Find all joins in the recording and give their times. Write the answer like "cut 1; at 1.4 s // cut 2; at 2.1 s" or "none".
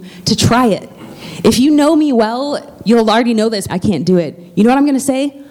cut 1; at 3.7 s